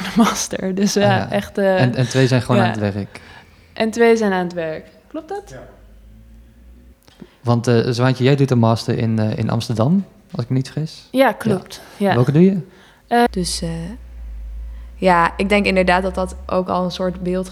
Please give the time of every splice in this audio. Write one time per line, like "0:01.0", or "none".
0:13.3